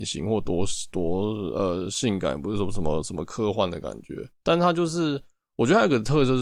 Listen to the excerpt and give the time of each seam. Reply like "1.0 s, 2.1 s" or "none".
4.3 s